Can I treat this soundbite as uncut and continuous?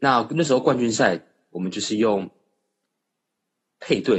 yes; 0 cuts

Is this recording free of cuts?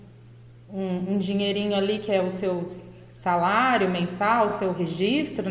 yes; 0 cuts

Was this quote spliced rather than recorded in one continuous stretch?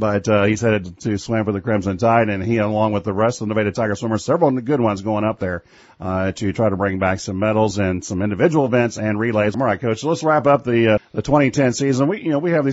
yes; 2 cuts; at 9.5 s, 11.0 s

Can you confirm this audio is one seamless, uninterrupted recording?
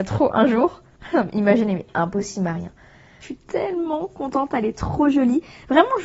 no; 1 cut; at 3.2 s

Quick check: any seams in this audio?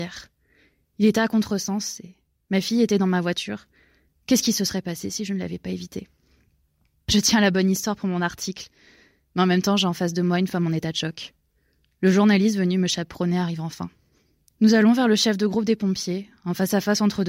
no; 0 cuts

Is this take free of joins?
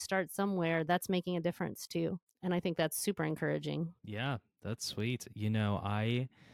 yes; 0 cuts

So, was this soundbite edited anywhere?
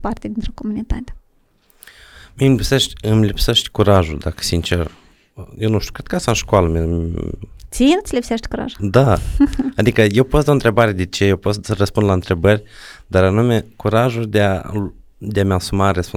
no; 0 cuts

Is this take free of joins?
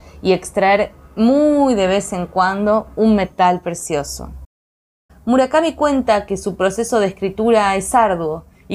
no; 1 cut; at 5.1 s

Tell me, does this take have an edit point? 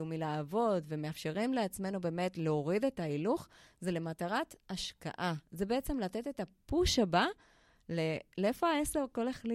no; 0 cuts

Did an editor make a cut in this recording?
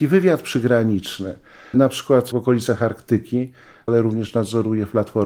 yes; 2 cuts; at 1.7 s, 3.9 s

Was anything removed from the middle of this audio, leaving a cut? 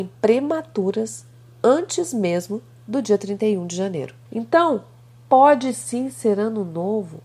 yes; 1 cut; at 4.2 s

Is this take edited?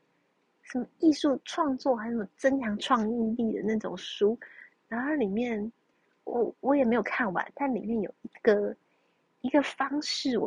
no; 0 cuts

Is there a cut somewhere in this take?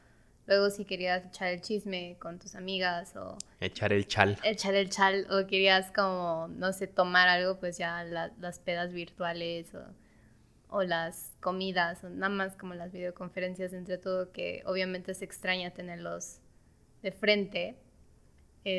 no; 0 cuts

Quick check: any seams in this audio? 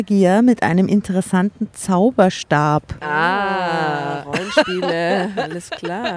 no; 0 cuts

